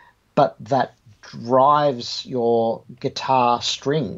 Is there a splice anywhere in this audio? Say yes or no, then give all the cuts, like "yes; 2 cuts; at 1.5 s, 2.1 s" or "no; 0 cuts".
no; 0 cuts